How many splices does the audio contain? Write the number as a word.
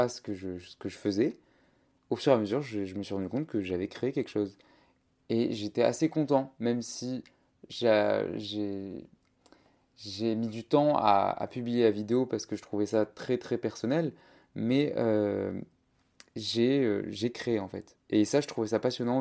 zero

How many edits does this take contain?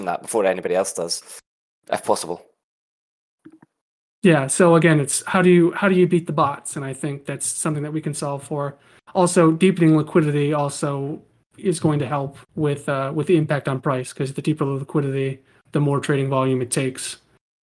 one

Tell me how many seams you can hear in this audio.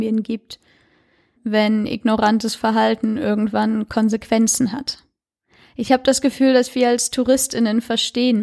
one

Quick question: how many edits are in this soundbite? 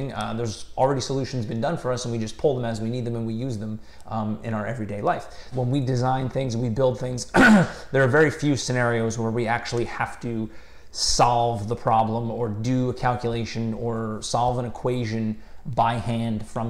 one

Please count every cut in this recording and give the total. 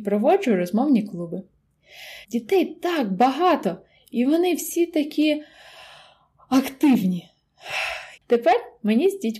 two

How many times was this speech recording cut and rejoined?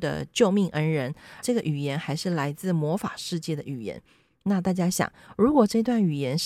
one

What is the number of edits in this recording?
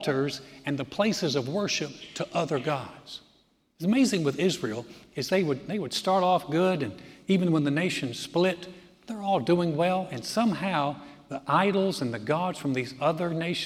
zero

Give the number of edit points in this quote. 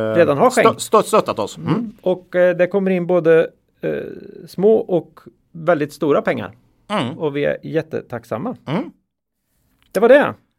zero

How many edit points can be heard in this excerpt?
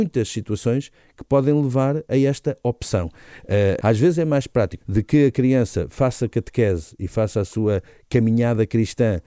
two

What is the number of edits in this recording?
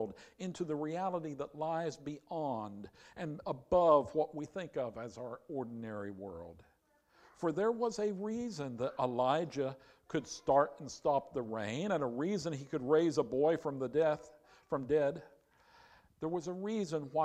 zero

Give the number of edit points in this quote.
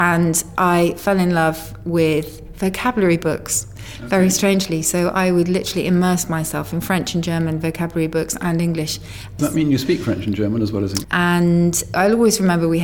two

